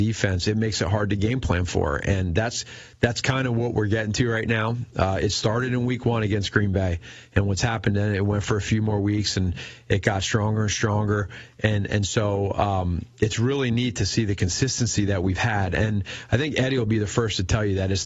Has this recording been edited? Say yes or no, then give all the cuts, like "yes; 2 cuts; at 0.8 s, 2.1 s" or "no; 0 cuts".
no; 0 cuts